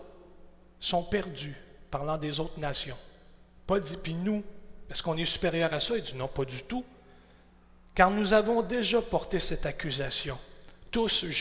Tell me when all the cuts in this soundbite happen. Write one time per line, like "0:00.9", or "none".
none